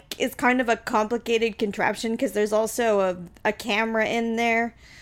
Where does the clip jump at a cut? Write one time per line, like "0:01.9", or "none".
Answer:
none